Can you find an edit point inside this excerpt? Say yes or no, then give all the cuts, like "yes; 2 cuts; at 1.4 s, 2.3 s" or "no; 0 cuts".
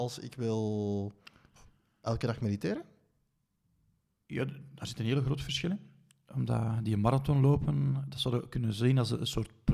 no; 0 cuts